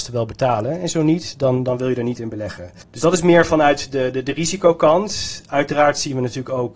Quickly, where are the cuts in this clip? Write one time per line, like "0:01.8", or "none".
none